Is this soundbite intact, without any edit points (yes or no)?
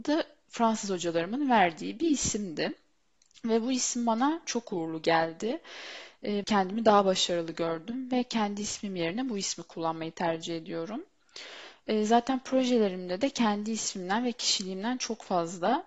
no